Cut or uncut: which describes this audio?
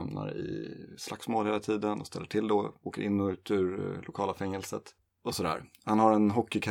uncut